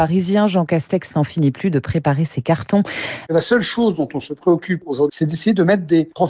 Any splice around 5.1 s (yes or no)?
yes